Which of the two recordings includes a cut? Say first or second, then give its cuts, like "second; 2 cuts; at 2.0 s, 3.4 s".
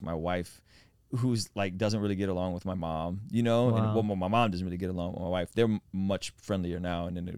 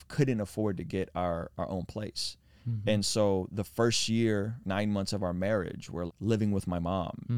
second; 2 cuts; at 4.6 s, 6.1 s